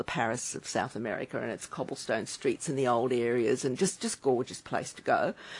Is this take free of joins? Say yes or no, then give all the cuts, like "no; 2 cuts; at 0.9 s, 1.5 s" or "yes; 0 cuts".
yes; 0 cuts